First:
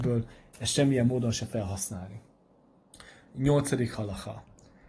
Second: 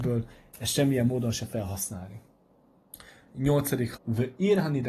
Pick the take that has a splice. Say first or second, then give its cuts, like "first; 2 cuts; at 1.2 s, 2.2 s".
second; 1 cut; at 4.0 s